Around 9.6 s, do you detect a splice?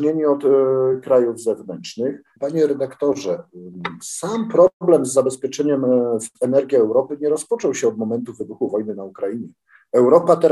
no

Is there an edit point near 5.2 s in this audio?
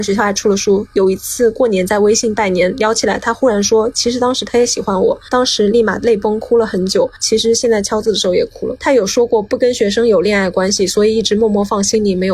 no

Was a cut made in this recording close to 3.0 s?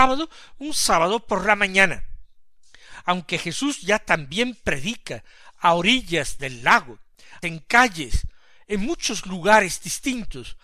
no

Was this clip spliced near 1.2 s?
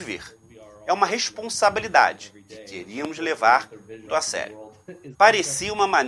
no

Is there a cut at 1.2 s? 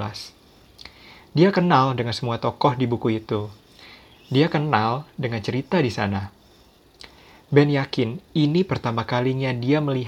no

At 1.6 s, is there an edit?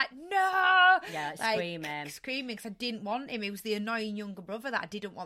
no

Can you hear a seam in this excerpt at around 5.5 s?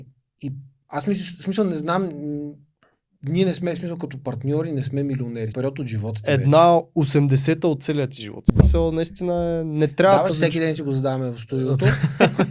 yes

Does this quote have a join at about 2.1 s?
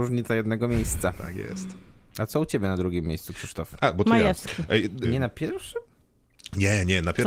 no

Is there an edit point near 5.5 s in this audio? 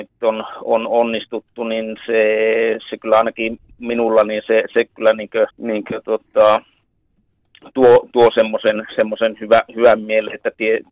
yes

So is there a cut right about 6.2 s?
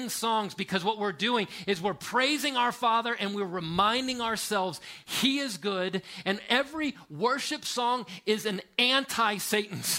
no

